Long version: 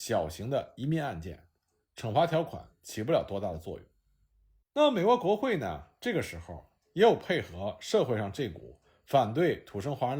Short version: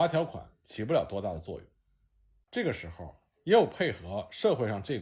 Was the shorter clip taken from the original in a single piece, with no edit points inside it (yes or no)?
no